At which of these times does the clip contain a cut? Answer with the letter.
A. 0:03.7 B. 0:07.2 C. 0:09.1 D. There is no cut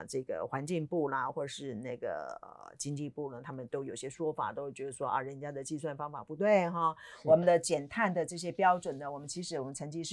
A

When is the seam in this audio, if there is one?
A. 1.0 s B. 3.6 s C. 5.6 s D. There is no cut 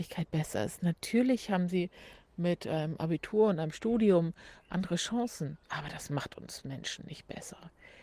C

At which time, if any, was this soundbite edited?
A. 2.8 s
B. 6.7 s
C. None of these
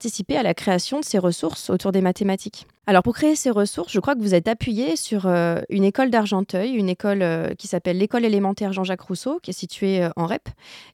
A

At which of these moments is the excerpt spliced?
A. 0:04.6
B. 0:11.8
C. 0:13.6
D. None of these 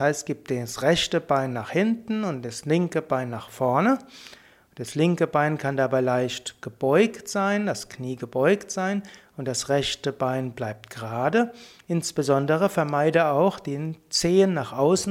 D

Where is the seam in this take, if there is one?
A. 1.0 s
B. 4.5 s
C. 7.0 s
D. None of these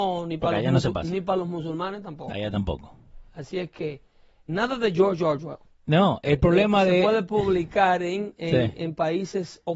B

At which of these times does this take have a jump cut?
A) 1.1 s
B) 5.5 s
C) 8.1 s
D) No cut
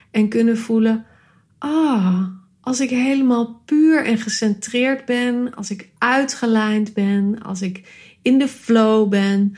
D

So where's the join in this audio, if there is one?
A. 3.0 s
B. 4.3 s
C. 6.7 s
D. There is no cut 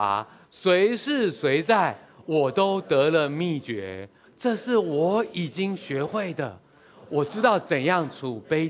B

